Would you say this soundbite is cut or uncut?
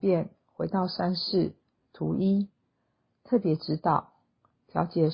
uncut